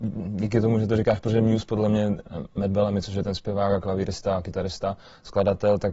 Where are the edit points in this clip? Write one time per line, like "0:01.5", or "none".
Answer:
none

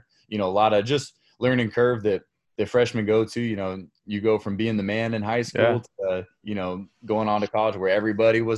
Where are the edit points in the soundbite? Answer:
none

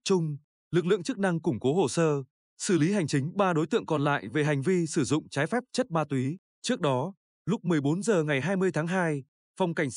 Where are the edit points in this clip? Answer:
0:06.5

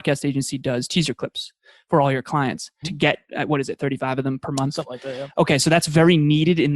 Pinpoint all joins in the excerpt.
0:02.8

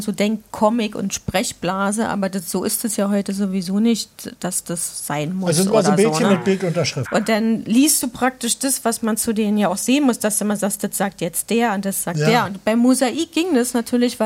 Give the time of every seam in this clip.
0:07.0

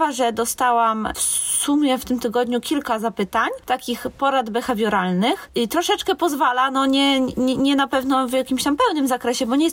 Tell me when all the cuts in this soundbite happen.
0:05.5

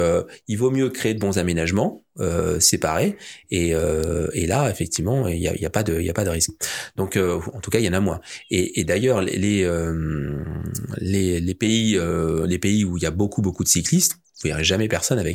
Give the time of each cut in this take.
none

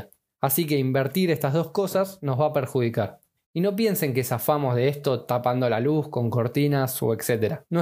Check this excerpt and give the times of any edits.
0:03.4

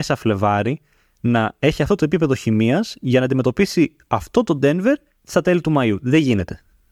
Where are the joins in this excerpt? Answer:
none

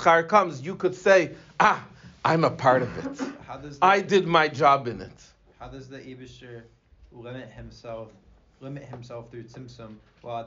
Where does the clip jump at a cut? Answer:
none

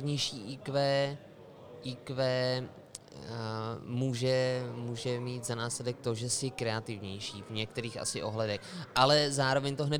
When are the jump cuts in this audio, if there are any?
none

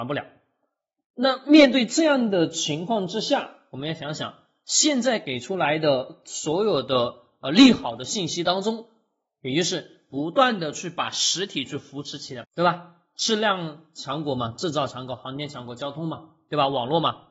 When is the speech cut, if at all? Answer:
0:12.4

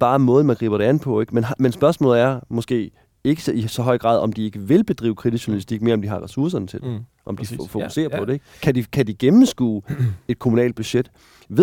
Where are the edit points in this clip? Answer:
none

